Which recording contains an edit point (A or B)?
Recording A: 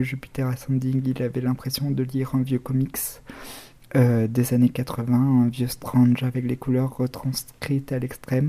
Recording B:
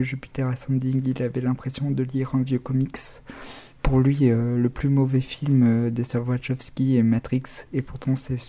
B